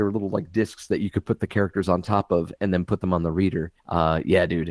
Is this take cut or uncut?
cut